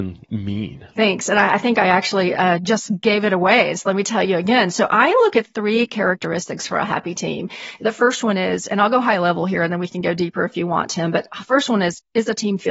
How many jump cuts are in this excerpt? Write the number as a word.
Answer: zero